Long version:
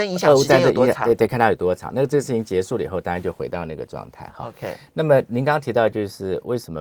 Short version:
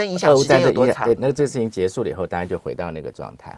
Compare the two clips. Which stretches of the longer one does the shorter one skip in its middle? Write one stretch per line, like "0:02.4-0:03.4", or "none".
0:01.2-0:01.9